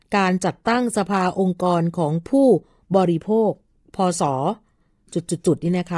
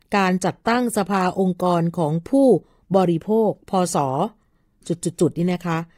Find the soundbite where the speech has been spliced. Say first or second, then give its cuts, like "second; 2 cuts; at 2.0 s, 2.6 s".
second; 1 cut; at 3.6 s